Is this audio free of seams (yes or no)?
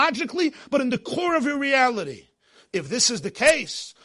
yes